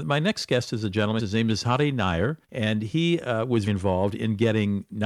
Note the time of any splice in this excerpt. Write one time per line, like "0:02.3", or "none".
0:01.2
0:02.4
0:03.7